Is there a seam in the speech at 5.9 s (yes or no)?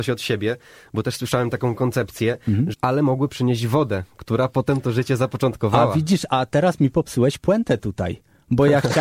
no